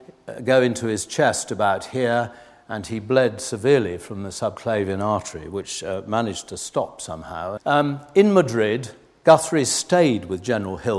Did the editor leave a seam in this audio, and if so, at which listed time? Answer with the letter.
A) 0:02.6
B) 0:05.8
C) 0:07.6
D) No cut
C